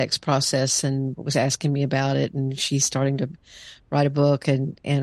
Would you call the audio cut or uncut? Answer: uncut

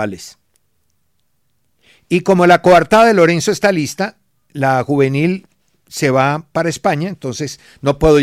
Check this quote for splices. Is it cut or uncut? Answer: uncut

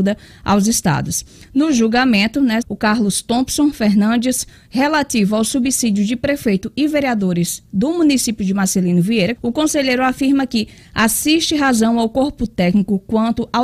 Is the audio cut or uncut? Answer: cut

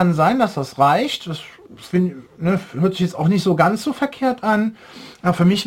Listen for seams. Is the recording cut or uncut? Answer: uncut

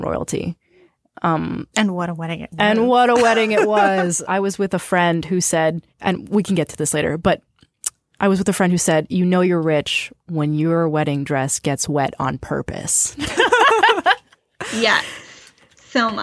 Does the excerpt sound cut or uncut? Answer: cut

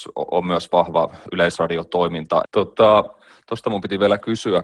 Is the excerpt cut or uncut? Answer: cut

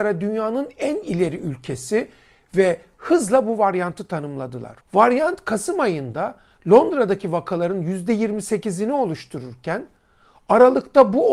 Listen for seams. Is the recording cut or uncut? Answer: cut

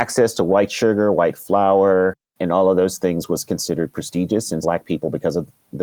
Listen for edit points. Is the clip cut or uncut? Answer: cut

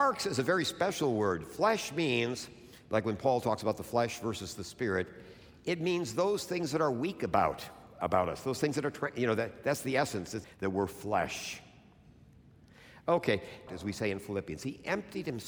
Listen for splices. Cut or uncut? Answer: cut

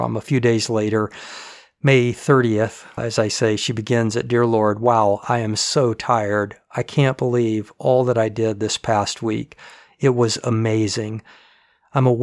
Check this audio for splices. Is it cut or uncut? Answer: cut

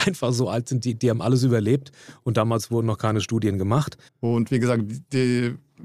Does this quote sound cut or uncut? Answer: cut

